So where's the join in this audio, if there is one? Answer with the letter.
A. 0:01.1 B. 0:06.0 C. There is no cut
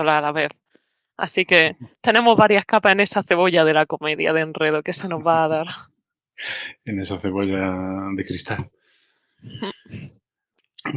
C